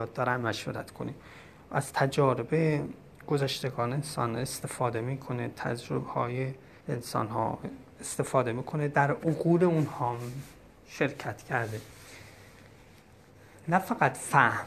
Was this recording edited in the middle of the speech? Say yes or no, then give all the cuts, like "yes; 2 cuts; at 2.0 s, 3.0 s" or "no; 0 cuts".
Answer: yes; 1 cut; at 6.8 s